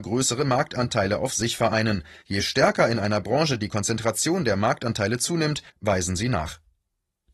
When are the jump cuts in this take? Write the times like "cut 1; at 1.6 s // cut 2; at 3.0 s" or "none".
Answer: cut 1; at 2.2 s // cut 2; at 5.7 s